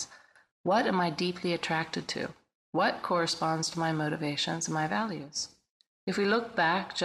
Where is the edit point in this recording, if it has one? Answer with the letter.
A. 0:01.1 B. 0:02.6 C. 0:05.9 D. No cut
C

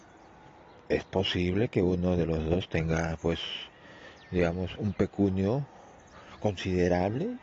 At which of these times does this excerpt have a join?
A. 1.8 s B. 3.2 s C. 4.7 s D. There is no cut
C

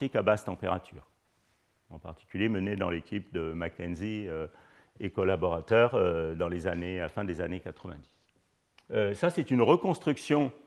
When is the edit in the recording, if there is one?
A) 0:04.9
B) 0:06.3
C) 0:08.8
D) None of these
C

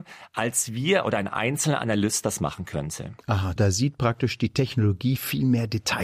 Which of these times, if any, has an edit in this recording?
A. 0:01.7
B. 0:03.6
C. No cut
B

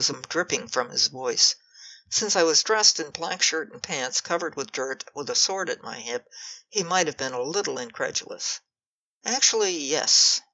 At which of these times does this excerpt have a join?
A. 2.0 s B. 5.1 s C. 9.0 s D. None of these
D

